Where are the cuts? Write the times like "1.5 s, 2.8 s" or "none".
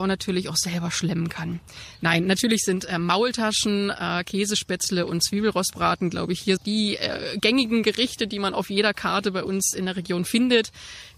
2.0 s, 6.6 s